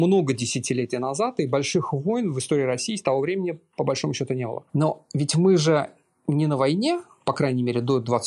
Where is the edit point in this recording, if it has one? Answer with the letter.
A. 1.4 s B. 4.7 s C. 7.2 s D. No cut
B